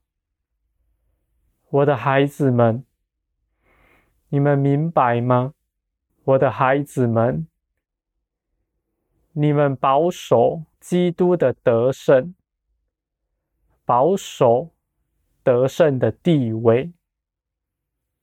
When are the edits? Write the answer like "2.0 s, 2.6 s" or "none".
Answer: 6.1 s, 10.7 s